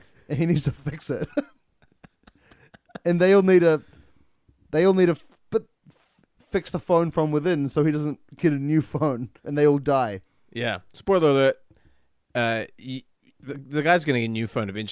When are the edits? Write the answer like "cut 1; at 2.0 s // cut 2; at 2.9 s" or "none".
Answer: cut 1; at 9.4 s